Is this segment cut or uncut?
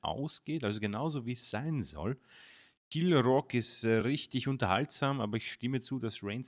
uncut